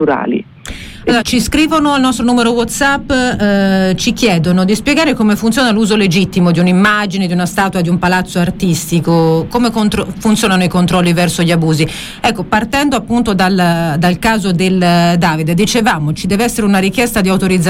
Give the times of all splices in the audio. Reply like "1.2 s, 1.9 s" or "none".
1.2 s